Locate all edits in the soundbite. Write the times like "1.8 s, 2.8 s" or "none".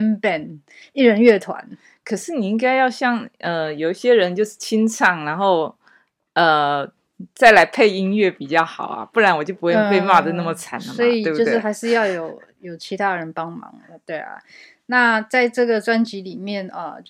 none